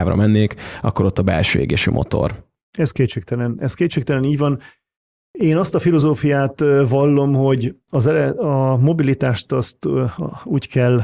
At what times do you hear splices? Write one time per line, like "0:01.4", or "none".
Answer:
none